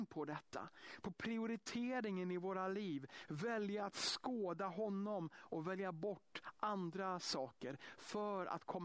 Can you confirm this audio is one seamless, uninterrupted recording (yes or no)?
yes